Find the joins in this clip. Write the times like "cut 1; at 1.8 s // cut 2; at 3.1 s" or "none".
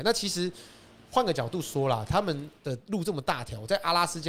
cut 1; at 2.6 s